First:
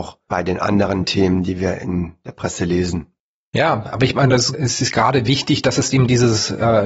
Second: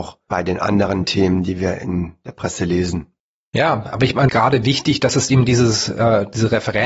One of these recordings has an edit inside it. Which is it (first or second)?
second